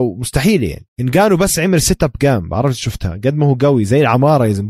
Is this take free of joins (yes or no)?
no